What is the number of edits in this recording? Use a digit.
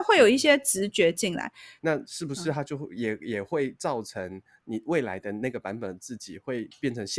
1